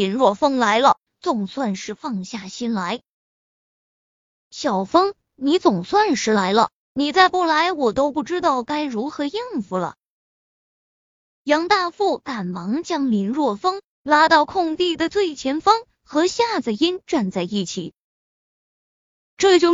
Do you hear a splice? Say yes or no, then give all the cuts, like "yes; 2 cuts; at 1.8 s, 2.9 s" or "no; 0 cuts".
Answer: yes; 1 cut; at 1.1 s